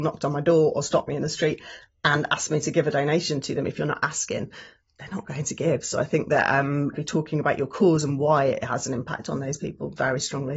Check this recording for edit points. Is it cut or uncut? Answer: cut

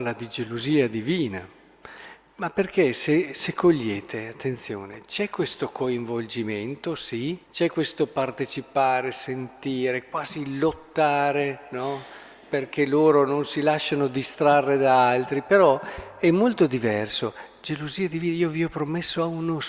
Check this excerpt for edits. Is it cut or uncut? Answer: cut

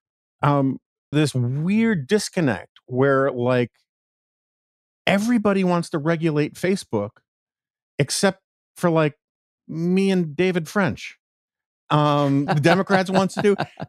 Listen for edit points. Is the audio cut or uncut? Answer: cut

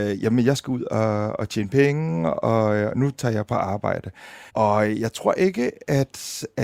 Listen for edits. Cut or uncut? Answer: cut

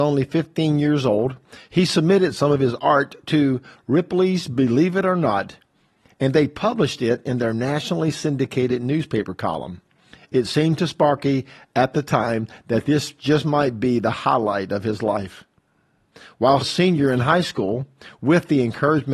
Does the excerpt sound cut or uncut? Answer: cut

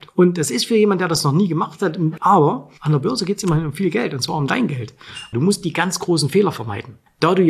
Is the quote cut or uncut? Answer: cut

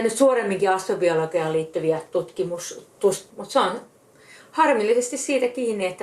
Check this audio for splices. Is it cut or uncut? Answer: cut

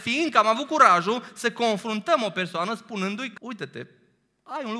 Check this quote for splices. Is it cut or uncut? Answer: cut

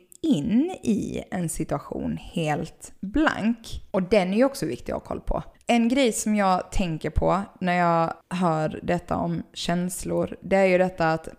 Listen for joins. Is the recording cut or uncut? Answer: cut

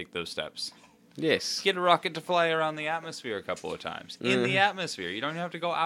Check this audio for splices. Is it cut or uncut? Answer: cut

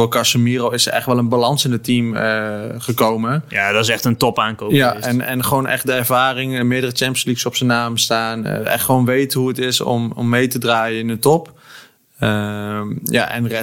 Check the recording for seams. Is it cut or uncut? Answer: uncut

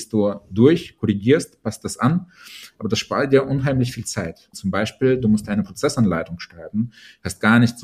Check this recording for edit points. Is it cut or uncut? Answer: cut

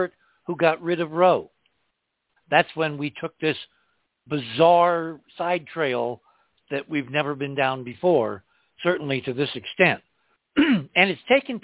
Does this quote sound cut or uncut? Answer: cut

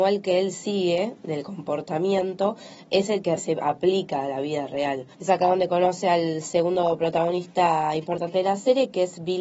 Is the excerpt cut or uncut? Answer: cut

